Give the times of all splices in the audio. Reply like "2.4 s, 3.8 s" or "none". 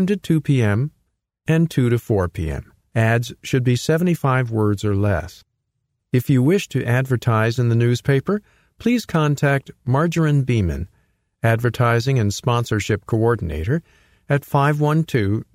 2.9 s, 6.0 s